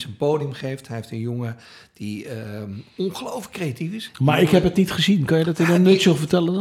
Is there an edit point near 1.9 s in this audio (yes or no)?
no